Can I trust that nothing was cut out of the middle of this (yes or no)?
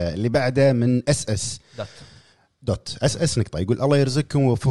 yes